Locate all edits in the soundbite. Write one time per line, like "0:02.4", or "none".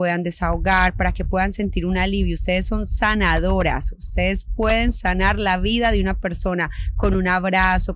none